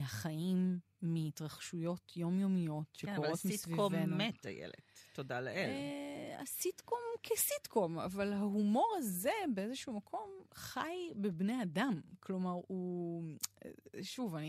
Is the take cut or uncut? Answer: uncut